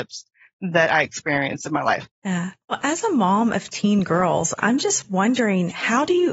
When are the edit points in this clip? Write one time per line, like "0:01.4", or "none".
0:02.6